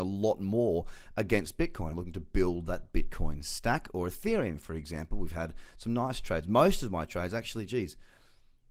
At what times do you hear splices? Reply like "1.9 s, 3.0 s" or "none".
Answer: none